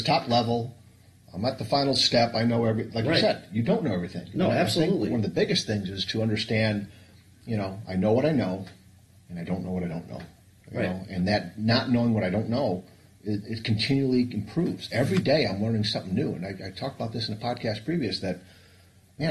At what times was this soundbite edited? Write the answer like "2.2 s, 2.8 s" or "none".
none

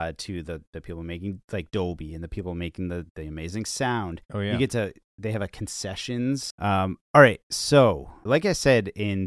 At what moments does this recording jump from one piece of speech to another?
6.5 s, 8.3 s

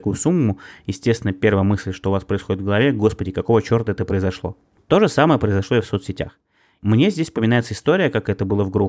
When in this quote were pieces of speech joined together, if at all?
none

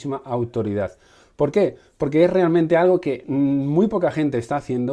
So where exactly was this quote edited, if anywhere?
none

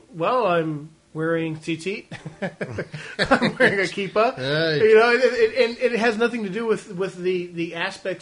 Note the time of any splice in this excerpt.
none

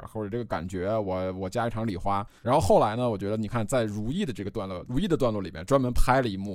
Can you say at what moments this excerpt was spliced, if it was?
2.4 s

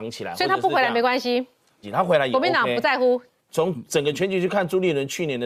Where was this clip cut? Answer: 1.8 s, 3.5 s

